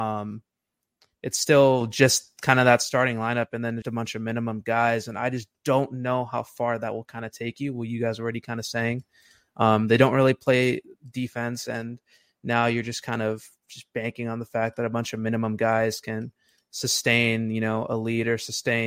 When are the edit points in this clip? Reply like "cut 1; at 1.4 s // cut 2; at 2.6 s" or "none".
cut 1; at 3.8 s